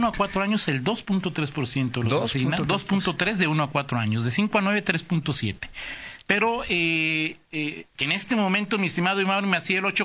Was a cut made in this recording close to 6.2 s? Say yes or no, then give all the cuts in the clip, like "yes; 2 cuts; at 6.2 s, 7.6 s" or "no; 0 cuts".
yes; 2 cuts; at 6.2 s, 7.9 s